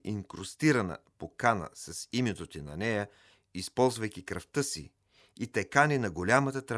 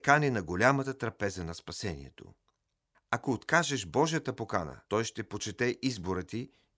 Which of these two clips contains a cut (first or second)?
second